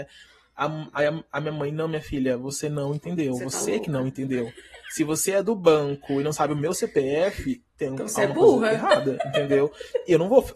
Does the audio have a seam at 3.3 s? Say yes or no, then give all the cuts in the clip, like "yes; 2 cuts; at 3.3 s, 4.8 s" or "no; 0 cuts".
no; 0 cuts